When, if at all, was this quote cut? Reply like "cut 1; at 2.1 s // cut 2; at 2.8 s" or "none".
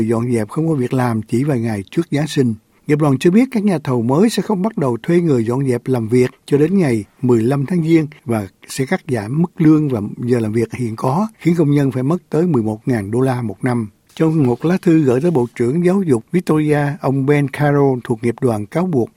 cut 1; at 11.3 s